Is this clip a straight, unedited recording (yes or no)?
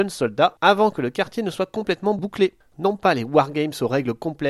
no